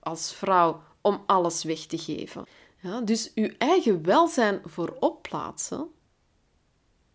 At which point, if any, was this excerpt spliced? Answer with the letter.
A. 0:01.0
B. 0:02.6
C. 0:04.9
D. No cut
D